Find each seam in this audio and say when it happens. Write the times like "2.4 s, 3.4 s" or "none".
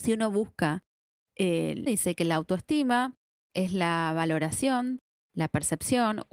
1.9 s